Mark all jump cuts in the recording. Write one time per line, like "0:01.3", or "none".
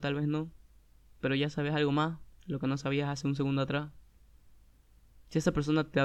none